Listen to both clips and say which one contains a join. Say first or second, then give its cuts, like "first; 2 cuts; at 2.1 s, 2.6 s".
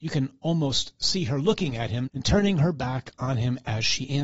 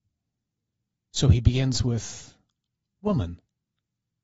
first; 1 cut; at 2.1 s